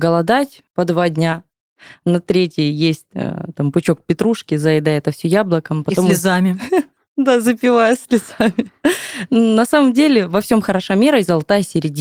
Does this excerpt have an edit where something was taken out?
no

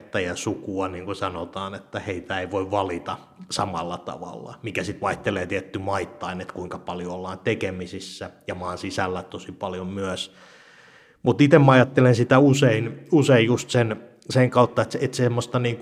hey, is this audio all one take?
yes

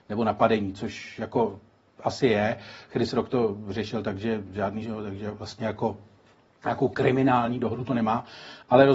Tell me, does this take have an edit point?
yes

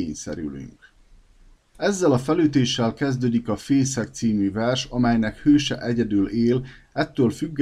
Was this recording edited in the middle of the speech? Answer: yes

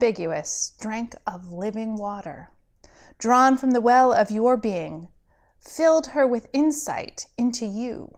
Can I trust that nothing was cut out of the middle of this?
yes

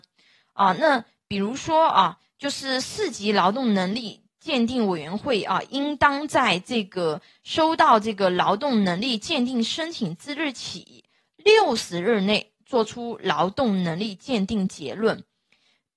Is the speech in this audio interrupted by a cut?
no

